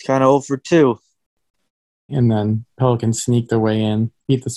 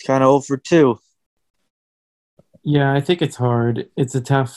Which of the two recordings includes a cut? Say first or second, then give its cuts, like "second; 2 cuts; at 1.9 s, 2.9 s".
first; 1 cut; at 2.1 s